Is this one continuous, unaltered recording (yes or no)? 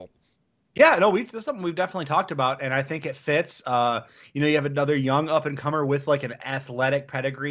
yes